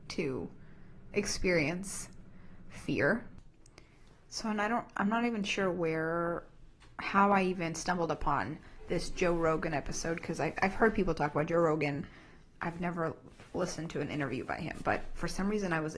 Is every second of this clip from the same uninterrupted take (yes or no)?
yes